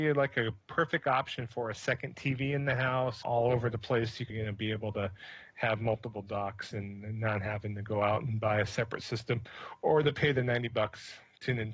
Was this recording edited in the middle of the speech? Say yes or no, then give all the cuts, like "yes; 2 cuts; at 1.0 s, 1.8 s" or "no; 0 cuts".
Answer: yes; 2 cuts; at 3.2 s, 4.3 s